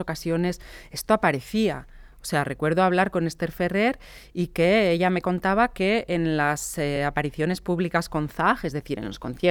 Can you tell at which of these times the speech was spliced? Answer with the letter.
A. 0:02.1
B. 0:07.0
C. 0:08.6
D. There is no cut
D